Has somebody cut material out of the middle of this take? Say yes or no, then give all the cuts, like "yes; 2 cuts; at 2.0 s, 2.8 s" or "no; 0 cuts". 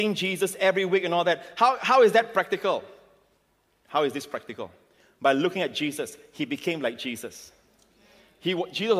no; 0 cuts